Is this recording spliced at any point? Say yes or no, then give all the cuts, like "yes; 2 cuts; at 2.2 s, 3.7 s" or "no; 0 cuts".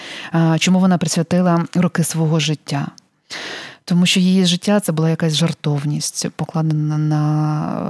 no; 0 cuts